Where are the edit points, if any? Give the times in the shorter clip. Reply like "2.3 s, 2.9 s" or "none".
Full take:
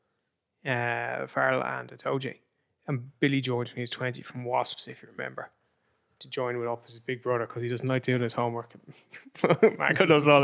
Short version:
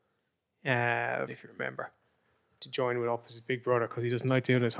1.3 s